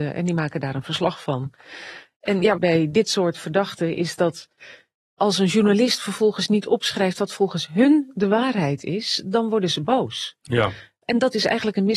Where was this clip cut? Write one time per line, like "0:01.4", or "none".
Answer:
0:02.6